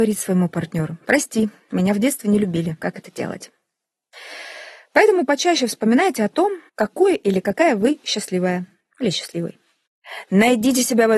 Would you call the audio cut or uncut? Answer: cut